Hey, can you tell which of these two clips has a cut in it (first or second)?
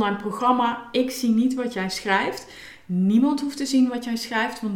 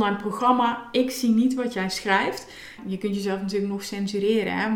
second